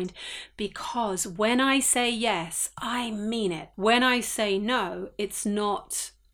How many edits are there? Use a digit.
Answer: 1